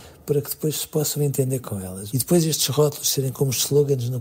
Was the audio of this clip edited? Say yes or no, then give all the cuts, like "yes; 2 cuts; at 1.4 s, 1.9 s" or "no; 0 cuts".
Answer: yes; 1 cut; at 2.1 s